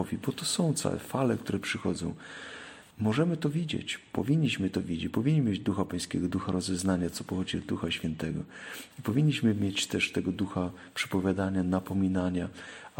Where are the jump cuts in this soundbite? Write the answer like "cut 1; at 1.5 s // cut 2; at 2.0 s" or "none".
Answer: cut 1; at 2.9 s // cut 2; at 7.1 s